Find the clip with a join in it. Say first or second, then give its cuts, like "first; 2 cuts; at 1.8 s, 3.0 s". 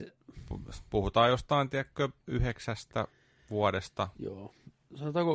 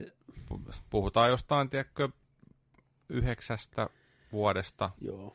first; 1 cut; at 2.2 s